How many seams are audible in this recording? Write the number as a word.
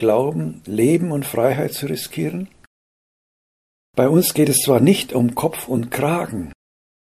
zero